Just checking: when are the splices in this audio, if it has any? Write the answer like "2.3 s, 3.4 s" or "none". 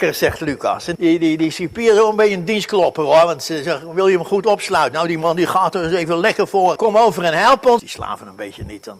1.0 s, 6.8 s, 7.8 s